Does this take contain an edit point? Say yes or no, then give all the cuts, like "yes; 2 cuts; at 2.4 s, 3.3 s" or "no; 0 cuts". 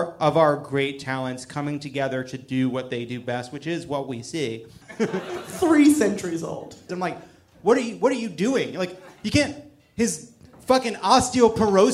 yes; 2 cuts; at 4.8 s, 6.9 s